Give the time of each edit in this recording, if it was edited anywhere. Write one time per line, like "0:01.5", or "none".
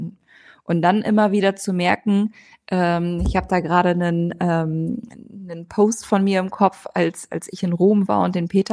none